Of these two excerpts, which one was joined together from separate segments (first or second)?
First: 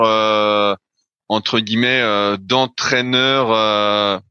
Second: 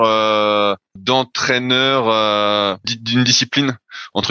second